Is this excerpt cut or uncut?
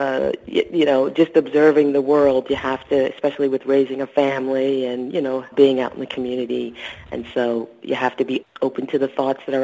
cut